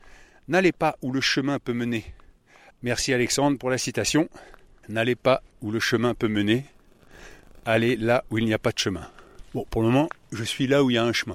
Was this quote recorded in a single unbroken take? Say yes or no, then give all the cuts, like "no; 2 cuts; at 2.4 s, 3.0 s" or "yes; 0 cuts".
no; 1 cut; at 2.7 s